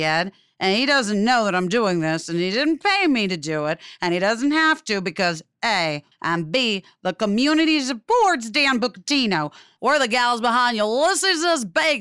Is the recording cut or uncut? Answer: cut